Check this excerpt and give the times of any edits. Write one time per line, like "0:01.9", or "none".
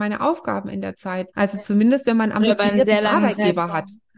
0:01.3